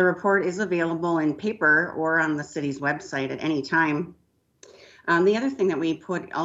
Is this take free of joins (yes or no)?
yes